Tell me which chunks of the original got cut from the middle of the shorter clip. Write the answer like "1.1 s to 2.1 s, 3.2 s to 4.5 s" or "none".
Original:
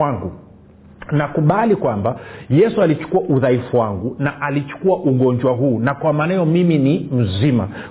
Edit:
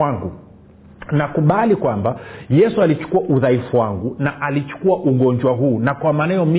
none